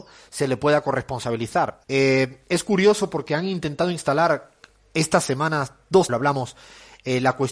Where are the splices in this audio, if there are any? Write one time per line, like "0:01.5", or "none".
0:01.8
0:06.1